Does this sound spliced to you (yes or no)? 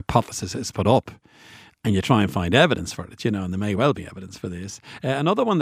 no